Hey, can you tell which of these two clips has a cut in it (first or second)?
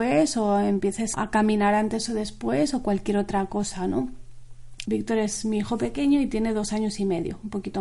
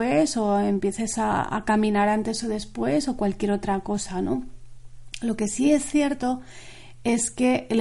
first